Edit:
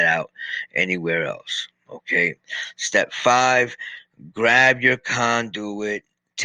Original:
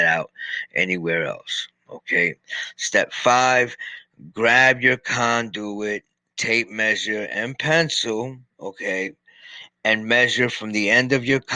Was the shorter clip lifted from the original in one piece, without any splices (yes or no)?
yes